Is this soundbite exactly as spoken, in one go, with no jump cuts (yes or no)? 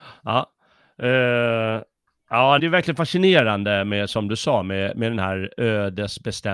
no